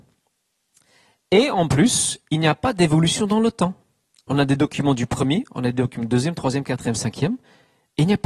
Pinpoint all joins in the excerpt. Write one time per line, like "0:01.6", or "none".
none